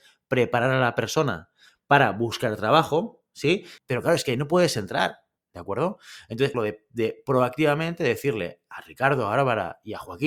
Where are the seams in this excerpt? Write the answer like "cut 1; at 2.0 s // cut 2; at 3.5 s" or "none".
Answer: cut 1; at 3.8 s // cut 2; at 5.4 s // cut 3; at 6.5 s